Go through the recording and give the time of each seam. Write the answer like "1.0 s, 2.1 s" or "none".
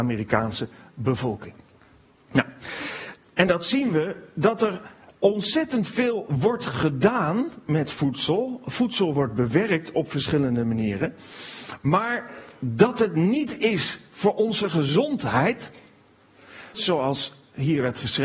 3.2 s, 16.7 s